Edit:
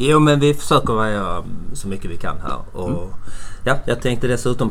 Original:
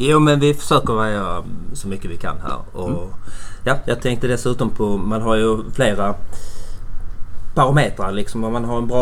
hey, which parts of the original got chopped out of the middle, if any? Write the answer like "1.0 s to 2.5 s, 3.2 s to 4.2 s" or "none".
none